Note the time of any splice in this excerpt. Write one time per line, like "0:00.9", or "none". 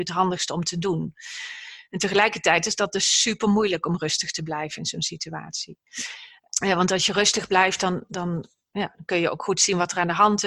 0:06.4